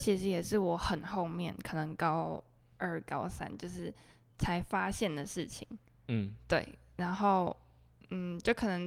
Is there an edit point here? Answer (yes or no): yes